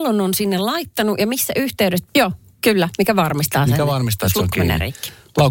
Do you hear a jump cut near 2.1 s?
yes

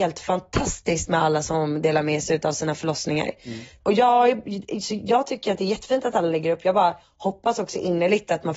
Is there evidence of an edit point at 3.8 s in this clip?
yes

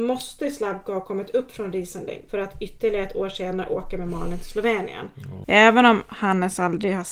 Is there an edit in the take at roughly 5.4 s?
yes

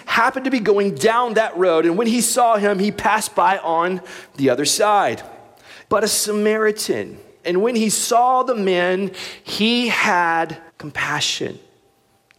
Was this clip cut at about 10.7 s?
yes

